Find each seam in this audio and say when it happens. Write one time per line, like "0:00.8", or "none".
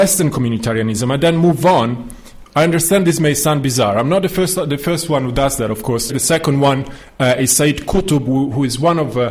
0:02.5
0:06.1